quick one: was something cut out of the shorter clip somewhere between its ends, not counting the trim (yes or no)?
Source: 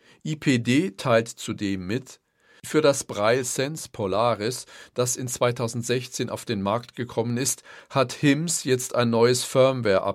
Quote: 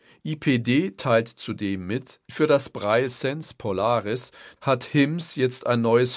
yes